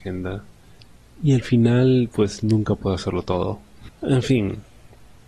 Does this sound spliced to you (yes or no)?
yes